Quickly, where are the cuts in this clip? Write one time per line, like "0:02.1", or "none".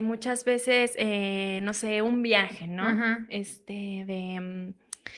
none